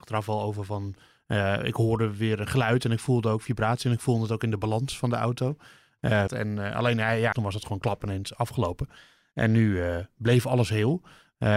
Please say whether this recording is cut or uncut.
cut